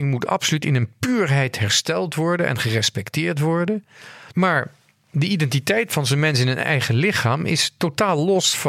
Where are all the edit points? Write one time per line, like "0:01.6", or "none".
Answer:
0:04.3